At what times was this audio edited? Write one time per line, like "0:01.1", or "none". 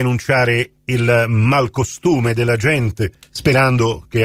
none